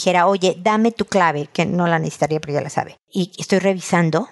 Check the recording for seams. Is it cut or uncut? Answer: uncut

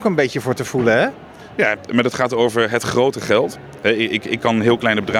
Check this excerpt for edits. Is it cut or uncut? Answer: uncut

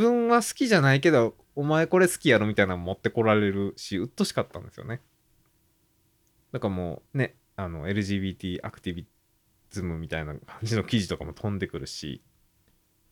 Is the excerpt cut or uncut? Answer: cut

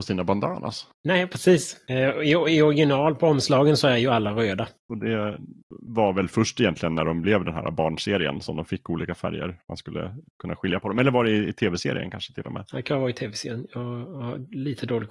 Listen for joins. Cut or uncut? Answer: uncut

